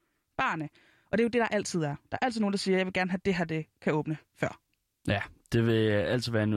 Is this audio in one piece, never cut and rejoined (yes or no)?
yes